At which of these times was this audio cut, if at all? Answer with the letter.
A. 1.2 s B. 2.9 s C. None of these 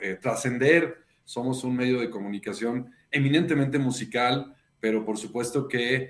A